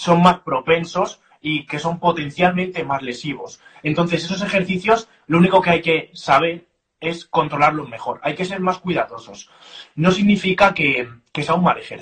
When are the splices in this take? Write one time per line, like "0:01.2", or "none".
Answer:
none

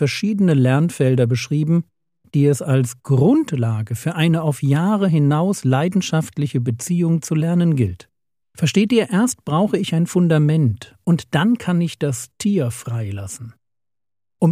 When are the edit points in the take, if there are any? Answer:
0:08.4

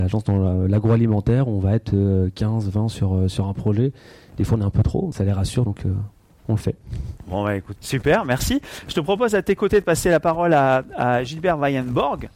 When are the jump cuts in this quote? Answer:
0:05.1
0:07.8

